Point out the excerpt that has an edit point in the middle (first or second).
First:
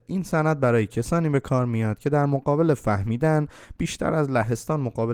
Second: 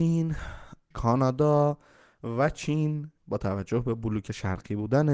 second